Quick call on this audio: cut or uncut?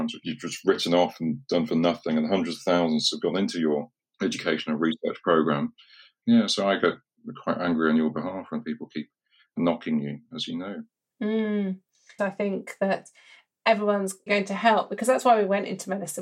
cut